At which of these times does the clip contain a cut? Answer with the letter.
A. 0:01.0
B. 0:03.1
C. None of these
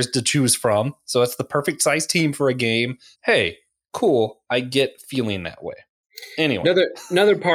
B